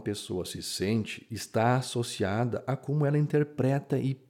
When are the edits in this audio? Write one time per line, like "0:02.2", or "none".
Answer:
none